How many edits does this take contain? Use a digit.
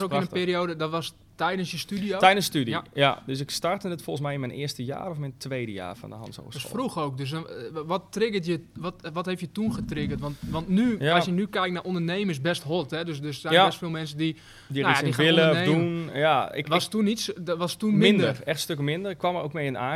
0